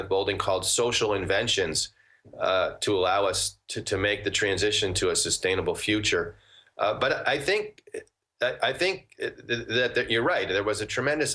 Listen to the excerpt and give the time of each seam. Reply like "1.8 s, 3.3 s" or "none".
none